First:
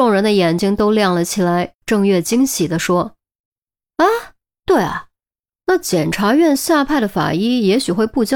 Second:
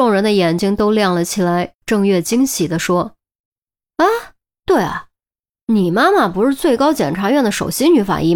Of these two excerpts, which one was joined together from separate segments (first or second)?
first